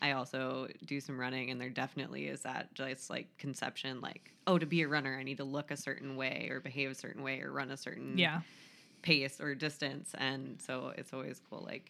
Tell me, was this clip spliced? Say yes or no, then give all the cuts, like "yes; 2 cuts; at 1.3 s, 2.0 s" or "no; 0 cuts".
no; 0 cuts